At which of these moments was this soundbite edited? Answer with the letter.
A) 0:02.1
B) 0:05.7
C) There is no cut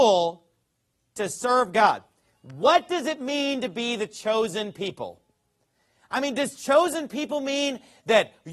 C